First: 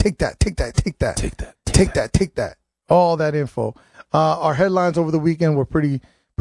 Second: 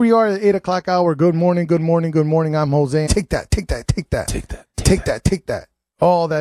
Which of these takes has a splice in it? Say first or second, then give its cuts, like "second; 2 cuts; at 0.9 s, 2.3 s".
second; 1 cut; at 3.1 s